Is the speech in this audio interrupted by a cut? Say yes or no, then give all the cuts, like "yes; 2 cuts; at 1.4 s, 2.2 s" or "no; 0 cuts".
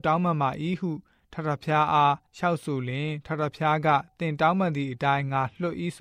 yes; 1 cut; at 2.3 s